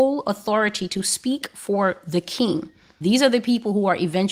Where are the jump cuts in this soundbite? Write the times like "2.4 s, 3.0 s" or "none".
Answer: 3.0 s